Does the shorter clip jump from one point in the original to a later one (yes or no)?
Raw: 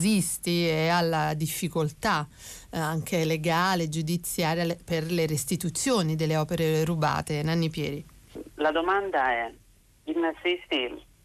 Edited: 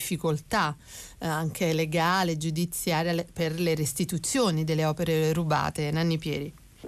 no